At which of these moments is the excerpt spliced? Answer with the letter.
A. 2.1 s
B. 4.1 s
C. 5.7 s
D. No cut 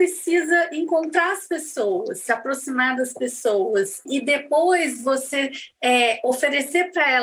B